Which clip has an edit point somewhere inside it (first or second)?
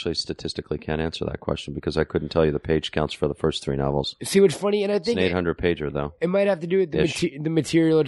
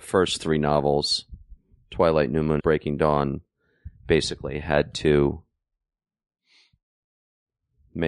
second